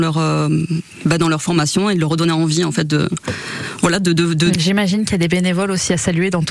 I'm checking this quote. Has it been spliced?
yes; 1 cut; at 4.5 s

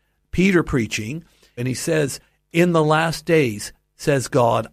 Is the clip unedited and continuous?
no; 1 cut; at 1.6 s

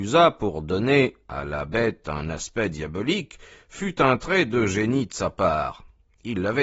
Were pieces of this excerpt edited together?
no; 0 cuts

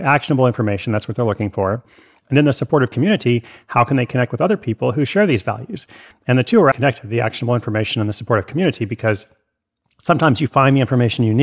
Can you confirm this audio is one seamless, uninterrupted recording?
no; 1 cut; at 6.7 s

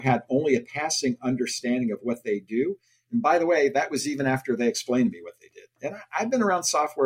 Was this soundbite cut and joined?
no; 0 cuts

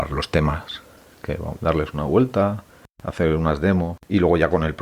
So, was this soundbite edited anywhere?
yes; 1 cut; at 1.6 s

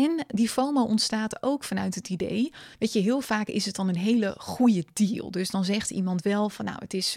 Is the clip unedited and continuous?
yes; 0 cuts

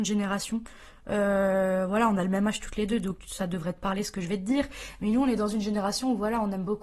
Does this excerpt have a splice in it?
no; 0 cuts

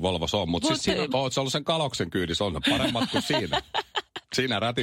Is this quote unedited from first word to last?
no; 1 cut; at 1.1 s

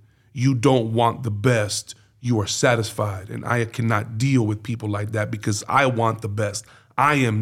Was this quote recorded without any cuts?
yes; 0 cuts

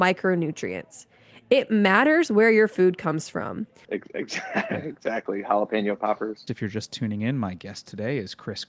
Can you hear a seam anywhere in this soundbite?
yes; 2 cuts; at 3.8 s, 6.5 s

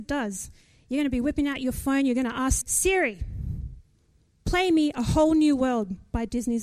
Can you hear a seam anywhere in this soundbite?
yes; 1 cut; at 2.6 s

